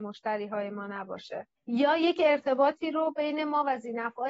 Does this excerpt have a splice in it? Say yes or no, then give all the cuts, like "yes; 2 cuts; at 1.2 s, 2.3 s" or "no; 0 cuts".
yes; 1 cut; at 1.6 s